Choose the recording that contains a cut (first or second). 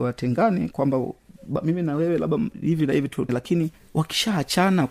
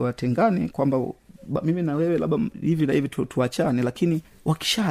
first